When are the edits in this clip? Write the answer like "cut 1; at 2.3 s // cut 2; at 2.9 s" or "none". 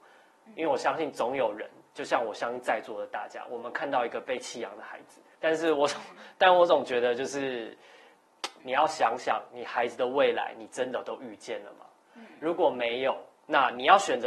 cut 1; at 5.4 s // cut 2; at 8.6 s